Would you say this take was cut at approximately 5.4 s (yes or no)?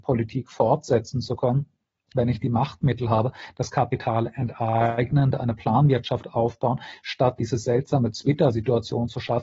no